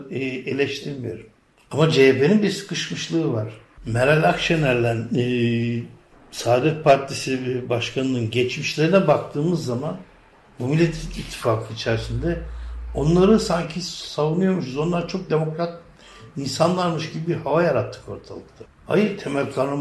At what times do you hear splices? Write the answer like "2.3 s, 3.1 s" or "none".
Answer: 3.8 s